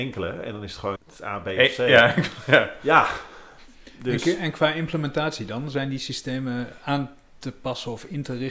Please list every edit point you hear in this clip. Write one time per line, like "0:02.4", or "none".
0:01.0